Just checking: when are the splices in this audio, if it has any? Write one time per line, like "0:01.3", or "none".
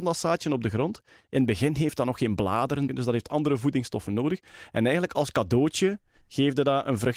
0:02.9